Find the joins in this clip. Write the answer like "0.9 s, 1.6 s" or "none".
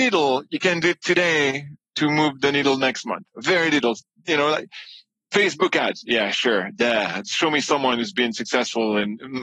none